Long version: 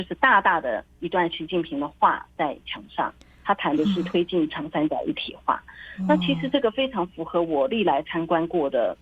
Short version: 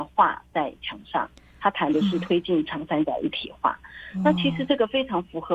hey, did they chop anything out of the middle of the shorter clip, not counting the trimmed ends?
no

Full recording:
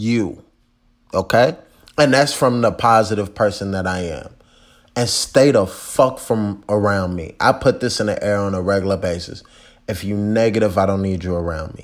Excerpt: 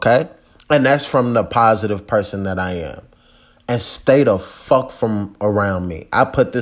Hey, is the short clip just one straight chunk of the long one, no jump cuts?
yes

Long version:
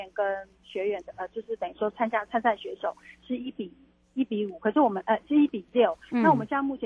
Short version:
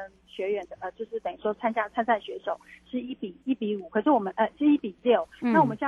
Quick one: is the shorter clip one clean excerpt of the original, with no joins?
no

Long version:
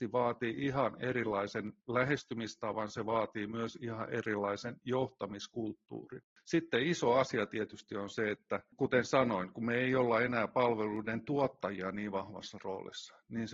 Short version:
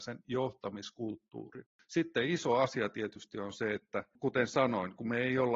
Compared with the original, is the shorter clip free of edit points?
yes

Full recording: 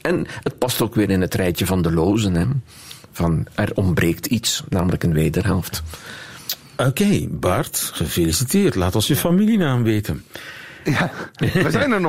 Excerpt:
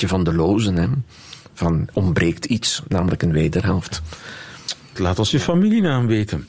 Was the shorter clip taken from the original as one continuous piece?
no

